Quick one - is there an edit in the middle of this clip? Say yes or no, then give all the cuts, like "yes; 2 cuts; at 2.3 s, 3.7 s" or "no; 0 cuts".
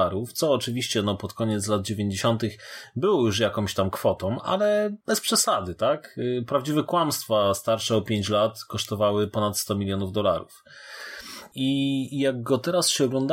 yes; 1 cut; at 5.0 s